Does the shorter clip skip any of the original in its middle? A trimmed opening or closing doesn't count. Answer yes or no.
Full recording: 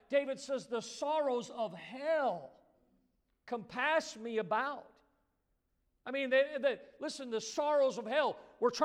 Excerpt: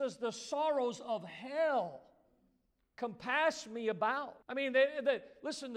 yes